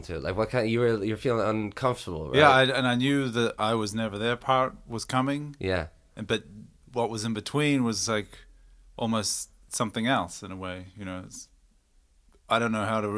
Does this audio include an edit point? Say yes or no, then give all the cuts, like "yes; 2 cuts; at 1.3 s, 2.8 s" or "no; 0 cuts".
no; 0 cuts